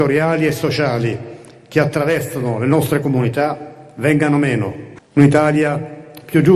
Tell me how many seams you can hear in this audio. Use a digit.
1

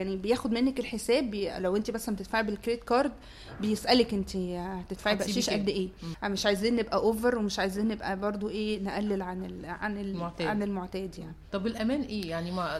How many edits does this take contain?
0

